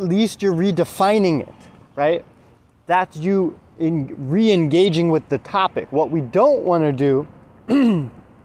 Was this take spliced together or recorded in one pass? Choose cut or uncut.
uncut